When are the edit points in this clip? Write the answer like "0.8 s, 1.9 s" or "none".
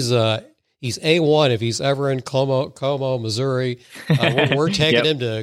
none